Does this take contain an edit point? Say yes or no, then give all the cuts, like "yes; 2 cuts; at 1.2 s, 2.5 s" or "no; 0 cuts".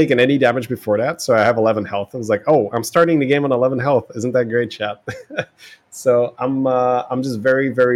no; 0 cuts